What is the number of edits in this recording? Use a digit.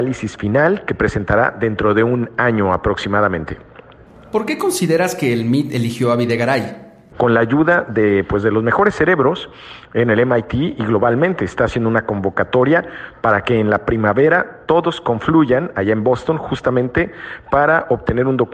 1